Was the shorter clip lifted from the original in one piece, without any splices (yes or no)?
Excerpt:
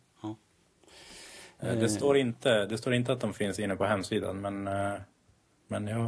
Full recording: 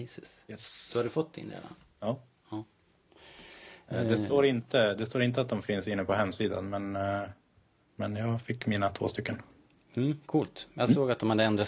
yes